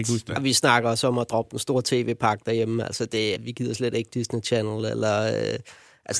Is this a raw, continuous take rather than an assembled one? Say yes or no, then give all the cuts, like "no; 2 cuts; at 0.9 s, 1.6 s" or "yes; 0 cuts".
no; 1 cut; at 3.3 s